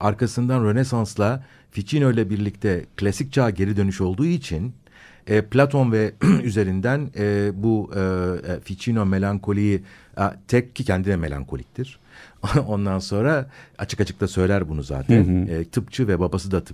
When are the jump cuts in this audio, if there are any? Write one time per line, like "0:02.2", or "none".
none